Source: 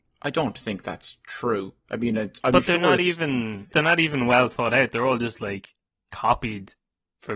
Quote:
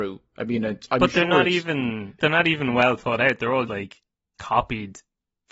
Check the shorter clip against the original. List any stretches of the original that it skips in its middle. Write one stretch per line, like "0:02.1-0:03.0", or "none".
0:05.2-0:05.4